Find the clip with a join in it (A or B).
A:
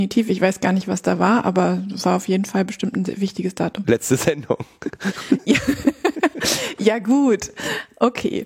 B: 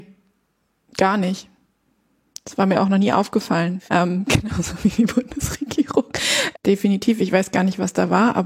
B